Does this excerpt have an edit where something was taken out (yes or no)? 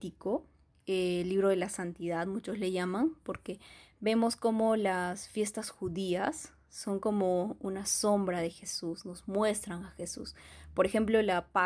no